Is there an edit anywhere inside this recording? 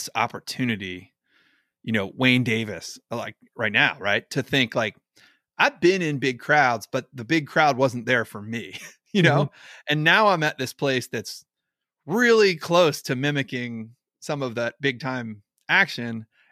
no; 0 cuts

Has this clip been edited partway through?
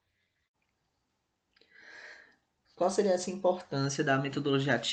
yes; 1 cut; at 2.7 s

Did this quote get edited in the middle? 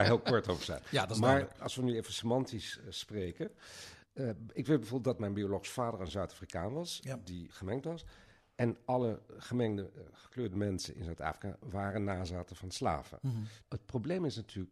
yes; 3 cuts; at 4.0 s, 7.5 s, 13.6 s

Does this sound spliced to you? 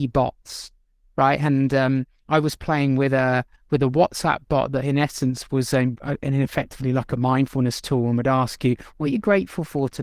no; 0 cuts

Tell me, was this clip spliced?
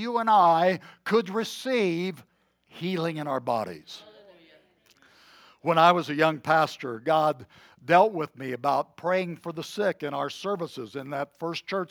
no; 0 cuts

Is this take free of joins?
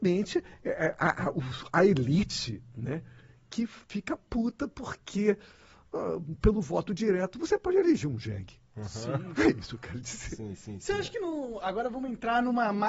yes; 0 cuts

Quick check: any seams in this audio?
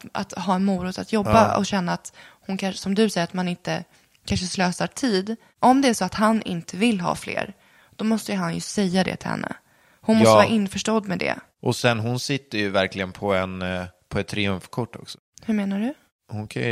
no; 0 cuts

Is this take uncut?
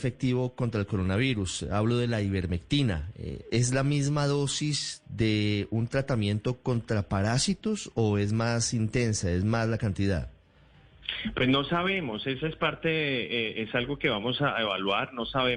yes; 0 cuts

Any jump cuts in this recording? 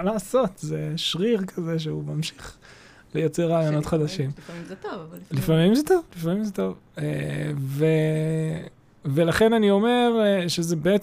no; 0 cuts

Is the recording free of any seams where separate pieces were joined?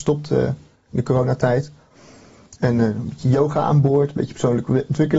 yes; 0 cuts

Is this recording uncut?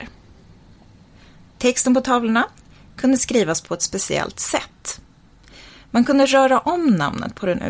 yes; 0 cuts

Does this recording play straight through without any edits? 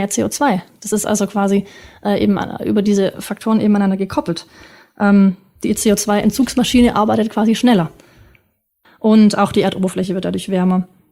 no; 1 cut; at 8.8 s

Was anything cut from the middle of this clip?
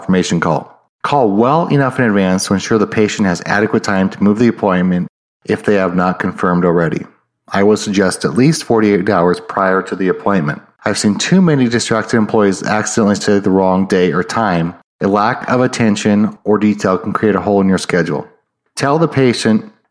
yes; 1 cut; at 10.8 s

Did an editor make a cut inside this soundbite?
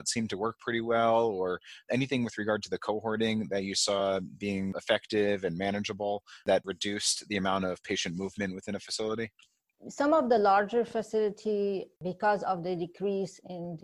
no; 0 cuts

